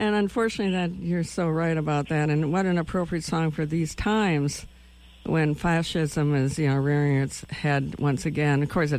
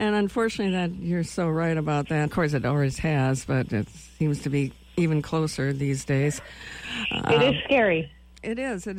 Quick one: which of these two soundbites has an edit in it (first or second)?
second